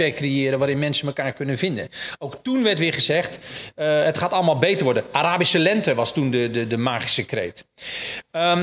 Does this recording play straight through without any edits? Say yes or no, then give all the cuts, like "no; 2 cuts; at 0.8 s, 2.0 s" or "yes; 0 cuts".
yes; 0 cuts